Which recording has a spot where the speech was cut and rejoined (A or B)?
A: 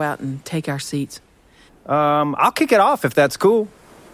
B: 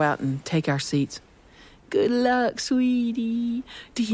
A